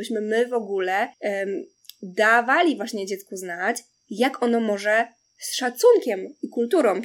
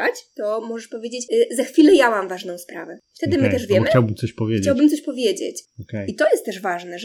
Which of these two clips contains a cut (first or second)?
second